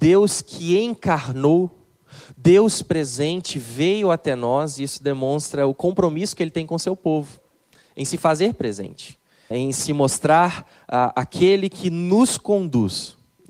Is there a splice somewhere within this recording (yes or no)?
yes